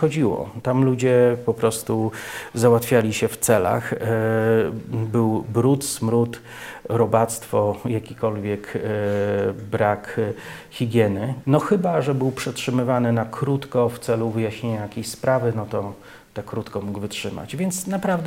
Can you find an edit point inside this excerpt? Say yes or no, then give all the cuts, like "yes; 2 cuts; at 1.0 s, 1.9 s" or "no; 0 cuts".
yes; 1 cut; at 11.4 s